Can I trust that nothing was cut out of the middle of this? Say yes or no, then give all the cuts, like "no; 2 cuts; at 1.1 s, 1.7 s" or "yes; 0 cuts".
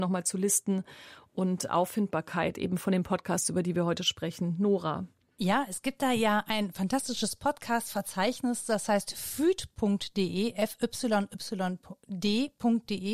yes; 0 cuts